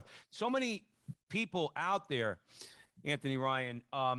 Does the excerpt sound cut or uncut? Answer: uncut